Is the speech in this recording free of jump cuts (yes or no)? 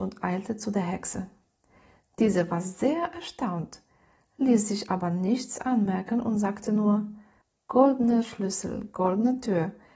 yes